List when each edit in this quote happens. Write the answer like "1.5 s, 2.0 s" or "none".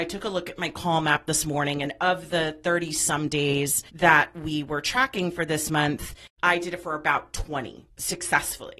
none